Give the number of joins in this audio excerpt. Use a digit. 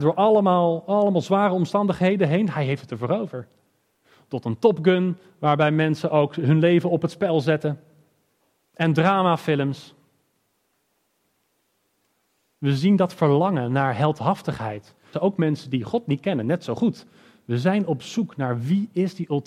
1